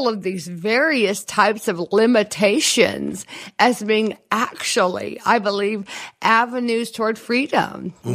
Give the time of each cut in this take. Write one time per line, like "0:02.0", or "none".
none